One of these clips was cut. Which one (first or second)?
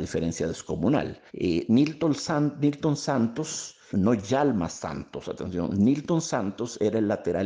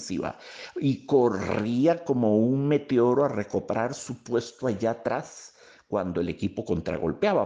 first